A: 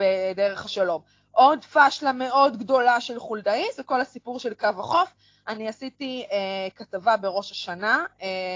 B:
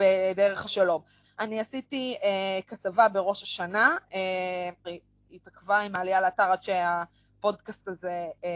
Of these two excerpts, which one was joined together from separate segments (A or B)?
B